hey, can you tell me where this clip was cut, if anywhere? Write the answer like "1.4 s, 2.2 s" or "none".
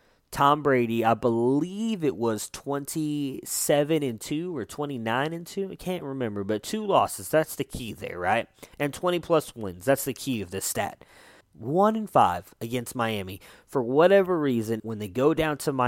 11.4 s, 14.8 s